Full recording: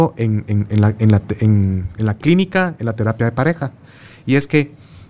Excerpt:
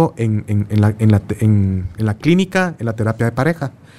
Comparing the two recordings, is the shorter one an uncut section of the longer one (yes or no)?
yes